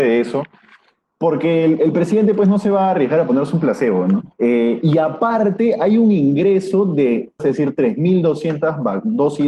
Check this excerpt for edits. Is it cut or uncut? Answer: cut